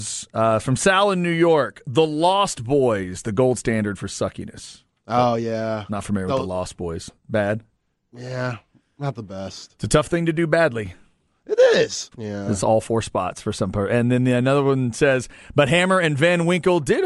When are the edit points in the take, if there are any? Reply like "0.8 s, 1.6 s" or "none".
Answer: 12.1 s